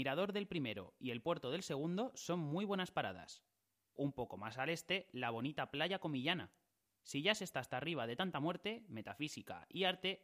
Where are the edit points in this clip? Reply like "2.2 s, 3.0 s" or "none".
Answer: none